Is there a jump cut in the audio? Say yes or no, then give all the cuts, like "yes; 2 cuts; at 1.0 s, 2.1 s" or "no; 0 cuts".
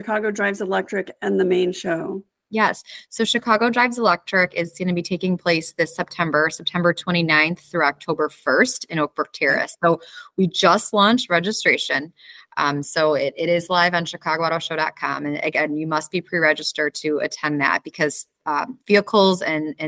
no; 0 cuts